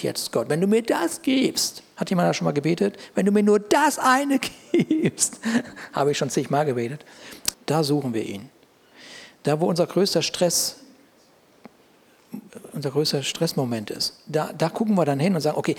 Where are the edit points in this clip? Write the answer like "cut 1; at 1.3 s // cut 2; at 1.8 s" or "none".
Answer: cut 1; at 7.5 s